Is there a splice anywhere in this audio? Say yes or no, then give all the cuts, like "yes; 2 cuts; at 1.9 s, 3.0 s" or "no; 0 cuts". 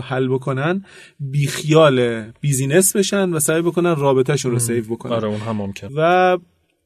yes; 1 cut; at 5.9 s